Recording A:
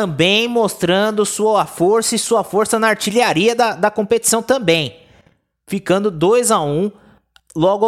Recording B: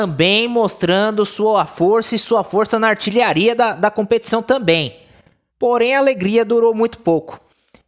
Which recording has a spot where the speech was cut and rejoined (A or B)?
B